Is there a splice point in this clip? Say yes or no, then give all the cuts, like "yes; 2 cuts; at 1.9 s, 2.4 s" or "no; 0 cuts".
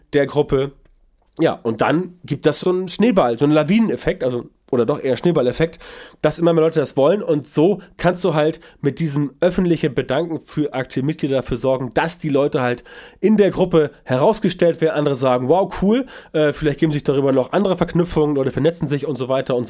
yes; 1 cut; at 2.6 s